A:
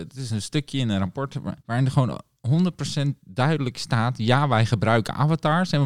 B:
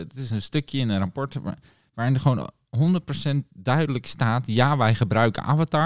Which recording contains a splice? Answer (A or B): A